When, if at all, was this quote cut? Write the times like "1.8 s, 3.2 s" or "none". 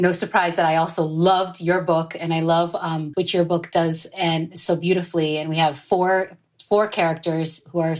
3.1 s

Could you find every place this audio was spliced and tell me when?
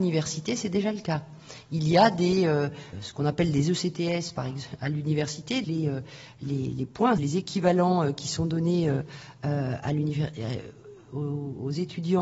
2.9 s, 5.6 s, 7.2 s

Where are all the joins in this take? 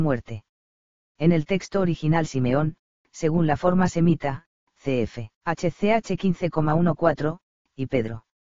1.0 s, 5.3 s

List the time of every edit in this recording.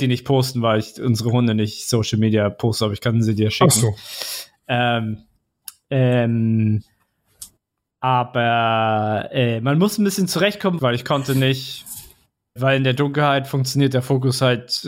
10.8 s, 12.6 s

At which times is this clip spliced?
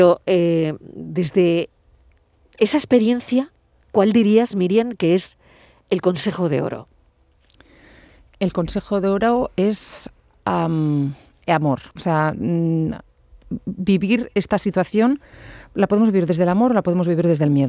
11.9 s

